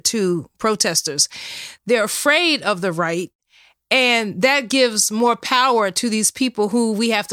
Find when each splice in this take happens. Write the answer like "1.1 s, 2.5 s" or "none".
1.8 s